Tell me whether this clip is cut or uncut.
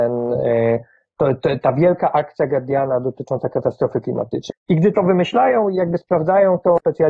cut